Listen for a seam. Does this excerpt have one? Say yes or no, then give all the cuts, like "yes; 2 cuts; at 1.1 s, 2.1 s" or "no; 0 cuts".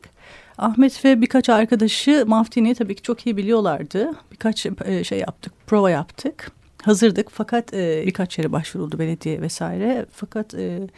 yes; 1 cut; at 8.0 s